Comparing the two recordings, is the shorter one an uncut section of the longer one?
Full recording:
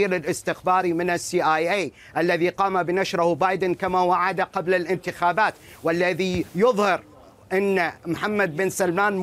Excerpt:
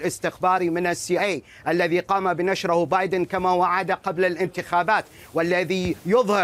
no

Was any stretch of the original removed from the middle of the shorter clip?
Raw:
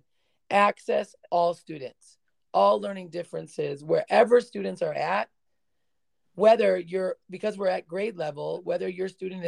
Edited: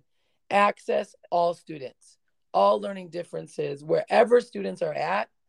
no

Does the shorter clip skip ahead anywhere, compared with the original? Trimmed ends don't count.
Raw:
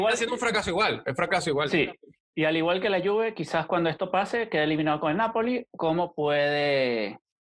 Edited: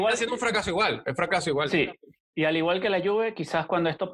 no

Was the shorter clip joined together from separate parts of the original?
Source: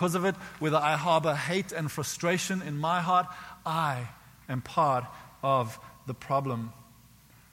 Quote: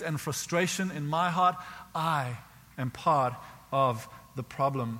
no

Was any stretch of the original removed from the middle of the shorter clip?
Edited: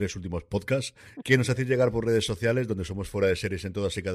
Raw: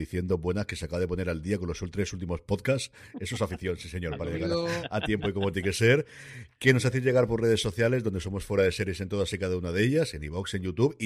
yes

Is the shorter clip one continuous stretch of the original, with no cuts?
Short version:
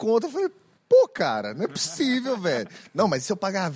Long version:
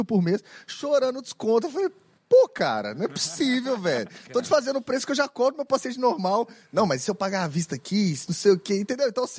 no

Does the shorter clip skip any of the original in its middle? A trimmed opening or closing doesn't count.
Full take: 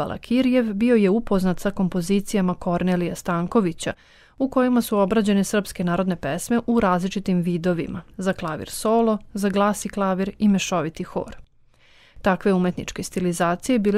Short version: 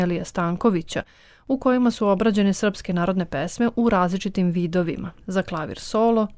no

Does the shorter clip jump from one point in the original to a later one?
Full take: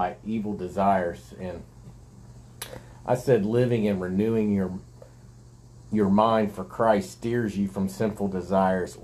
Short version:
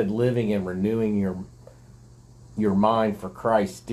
no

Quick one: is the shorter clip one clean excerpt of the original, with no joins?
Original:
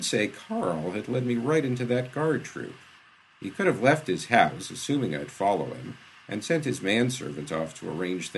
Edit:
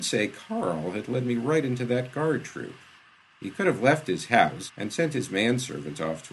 no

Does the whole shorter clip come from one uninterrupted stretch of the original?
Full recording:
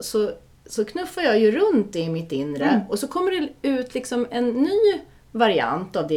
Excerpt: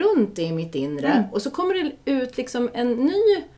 yes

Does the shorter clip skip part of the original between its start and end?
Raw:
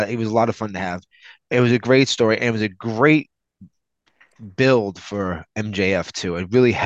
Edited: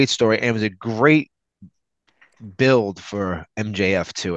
no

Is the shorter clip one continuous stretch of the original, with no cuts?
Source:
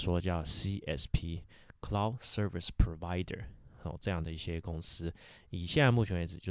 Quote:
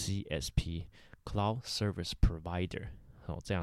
yes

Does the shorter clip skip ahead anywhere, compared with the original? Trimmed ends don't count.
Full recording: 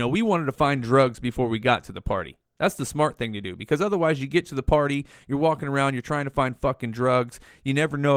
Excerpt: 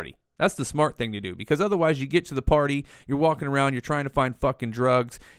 no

